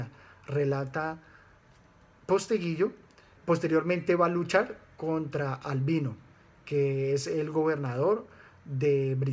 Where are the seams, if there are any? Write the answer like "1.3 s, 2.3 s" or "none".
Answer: 3.4 s